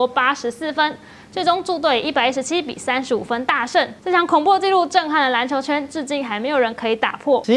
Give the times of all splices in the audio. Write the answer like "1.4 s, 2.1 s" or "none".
4.0 s